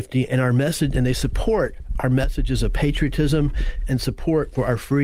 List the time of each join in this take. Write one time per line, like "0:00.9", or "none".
none